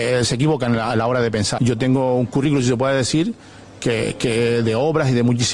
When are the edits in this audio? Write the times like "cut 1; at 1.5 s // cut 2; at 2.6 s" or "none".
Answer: cut 1; at 1.6 s

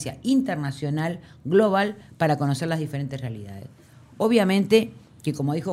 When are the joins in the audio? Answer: none

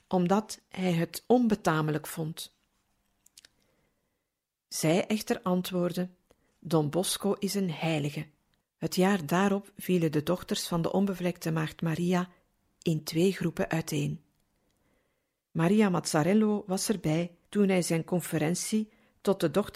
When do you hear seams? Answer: cut 1; at 8.6 s // cut 2; at 15.5 s // cut 3; at 17.4 s

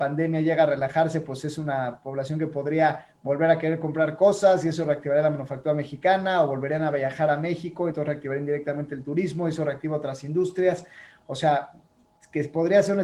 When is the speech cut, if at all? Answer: none

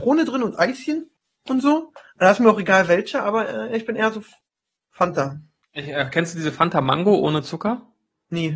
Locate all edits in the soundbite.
none

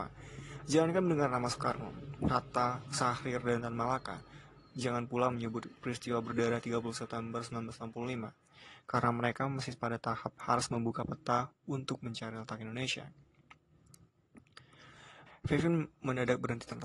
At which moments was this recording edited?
cut 1; at 15.3 s

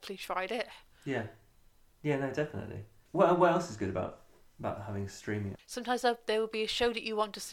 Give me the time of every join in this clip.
cut 1; at 5.5 s

